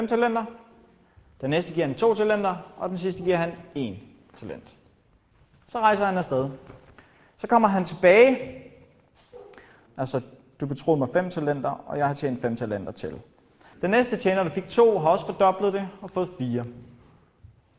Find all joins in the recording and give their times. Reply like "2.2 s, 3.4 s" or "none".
9.9 s, 13.7 s